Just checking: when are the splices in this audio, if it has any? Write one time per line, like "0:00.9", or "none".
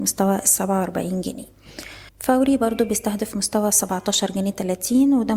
0:02.1